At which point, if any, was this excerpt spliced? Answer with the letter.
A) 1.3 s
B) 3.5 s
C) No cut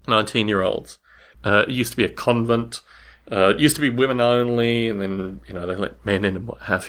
A